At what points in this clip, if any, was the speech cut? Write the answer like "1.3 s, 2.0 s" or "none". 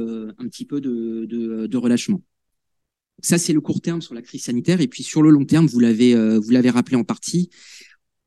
none